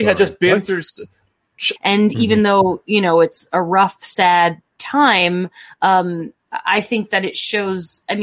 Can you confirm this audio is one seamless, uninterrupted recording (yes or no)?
no